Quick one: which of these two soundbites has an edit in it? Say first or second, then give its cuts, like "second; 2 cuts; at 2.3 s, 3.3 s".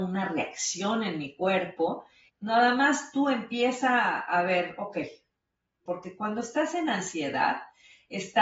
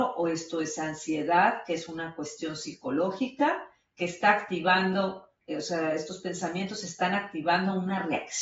first; 2 cuts; at 2.3 s, 5.9 s